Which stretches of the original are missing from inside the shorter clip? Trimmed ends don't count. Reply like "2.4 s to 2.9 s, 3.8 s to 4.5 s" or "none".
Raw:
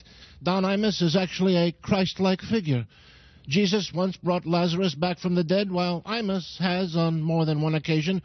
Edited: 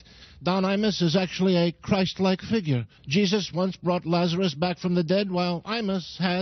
3.0 s to 3.4 s